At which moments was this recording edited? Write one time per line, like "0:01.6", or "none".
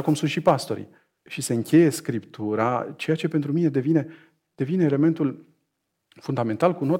0:01.2